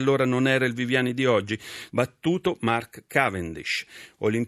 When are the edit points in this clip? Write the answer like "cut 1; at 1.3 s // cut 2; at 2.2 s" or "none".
cut 1; at 1.9 s